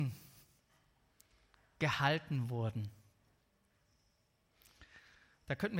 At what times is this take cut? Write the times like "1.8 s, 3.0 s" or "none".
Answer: none